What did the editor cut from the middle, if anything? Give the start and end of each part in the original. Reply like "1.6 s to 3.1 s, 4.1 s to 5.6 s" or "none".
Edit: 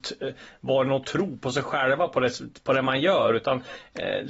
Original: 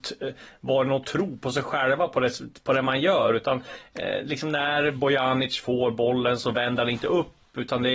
none